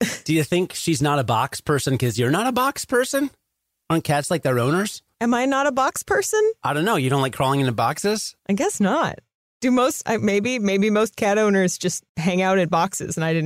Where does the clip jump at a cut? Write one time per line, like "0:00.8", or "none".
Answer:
0:08.4